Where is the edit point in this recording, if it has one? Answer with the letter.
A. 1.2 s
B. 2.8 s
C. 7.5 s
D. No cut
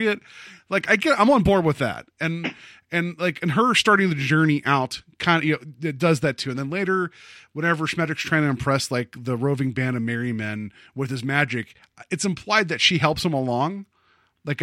D